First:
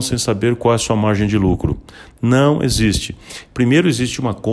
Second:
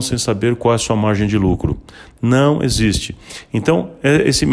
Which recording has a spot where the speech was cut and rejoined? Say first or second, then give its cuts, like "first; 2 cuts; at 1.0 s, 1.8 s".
first; 1 cut; at 3.5 s